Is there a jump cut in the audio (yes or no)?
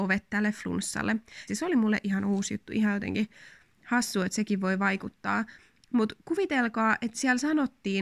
yes